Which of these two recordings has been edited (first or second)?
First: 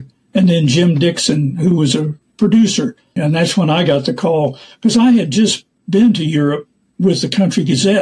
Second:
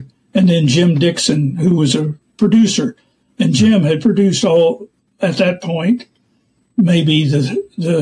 first